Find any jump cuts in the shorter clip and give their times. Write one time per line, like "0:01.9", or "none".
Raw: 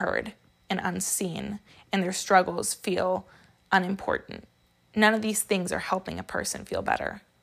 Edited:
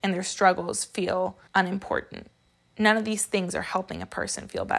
0:01.5

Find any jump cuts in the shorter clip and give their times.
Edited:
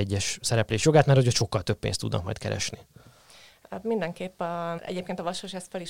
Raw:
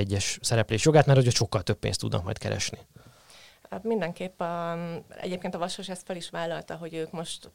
0:04.8

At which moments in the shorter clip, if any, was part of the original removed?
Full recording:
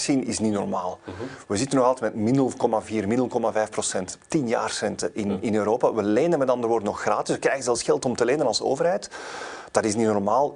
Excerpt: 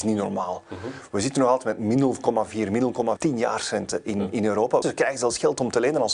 0:03.2
0:04.8

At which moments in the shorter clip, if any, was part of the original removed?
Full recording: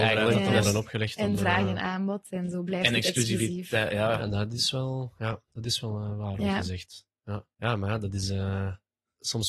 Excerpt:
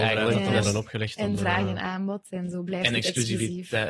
none

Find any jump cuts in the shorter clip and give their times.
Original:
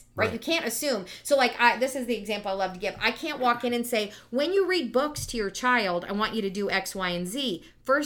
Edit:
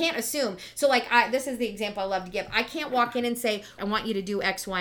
0:03.8

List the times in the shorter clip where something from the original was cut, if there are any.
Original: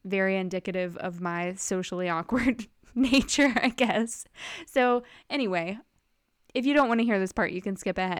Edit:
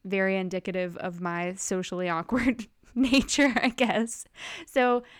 none

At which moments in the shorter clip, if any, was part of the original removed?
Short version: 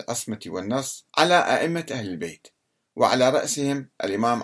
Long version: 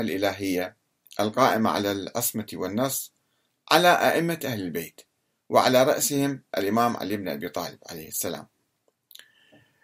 0:01.1

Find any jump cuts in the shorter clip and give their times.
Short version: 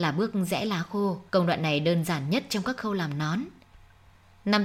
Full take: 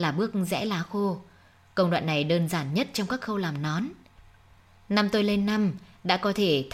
0:01.3

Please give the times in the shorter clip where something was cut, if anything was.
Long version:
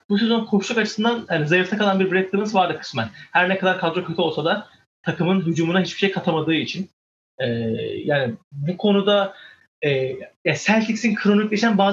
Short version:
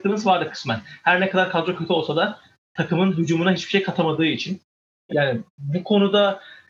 0:05.1

